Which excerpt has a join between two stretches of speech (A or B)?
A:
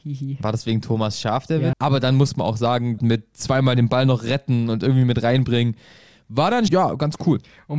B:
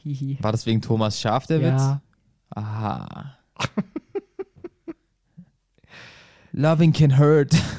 A